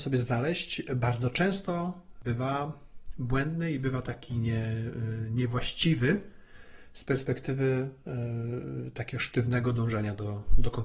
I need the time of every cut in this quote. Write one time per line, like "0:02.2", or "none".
none